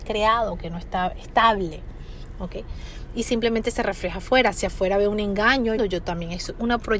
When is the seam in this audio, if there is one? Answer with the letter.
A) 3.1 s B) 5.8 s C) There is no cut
B